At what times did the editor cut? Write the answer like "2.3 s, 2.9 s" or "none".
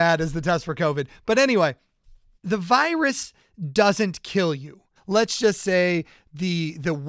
2.4 s, 5.0 s